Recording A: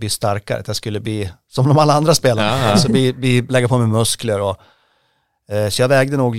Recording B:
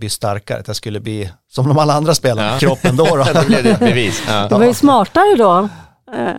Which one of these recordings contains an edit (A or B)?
B